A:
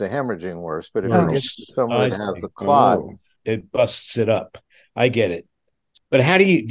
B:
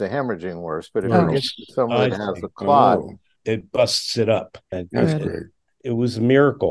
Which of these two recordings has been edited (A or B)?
B